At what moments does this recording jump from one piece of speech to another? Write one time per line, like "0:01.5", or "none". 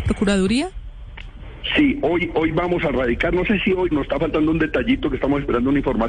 0:03.9